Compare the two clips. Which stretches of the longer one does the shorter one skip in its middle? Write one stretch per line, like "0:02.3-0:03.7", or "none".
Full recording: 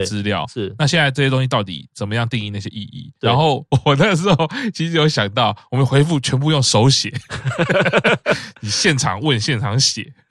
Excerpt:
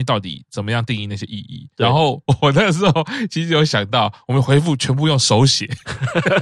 none